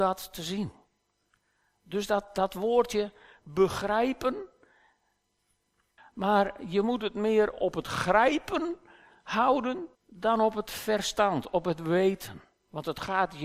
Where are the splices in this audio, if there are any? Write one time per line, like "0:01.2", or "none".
0:06.0
0:10.0